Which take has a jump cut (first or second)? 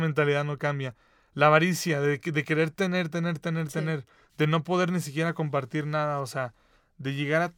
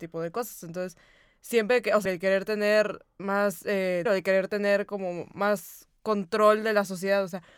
second